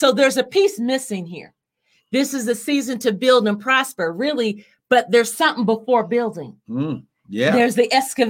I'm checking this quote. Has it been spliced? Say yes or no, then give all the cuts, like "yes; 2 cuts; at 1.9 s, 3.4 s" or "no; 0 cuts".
no; 0 cuts